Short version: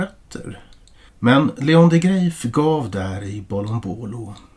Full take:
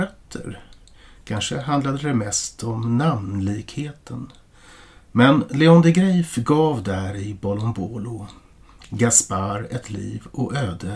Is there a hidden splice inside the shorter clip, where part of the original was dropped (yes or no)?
yes